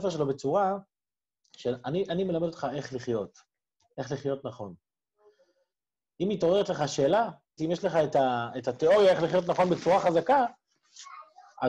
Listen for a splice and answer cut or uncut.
cut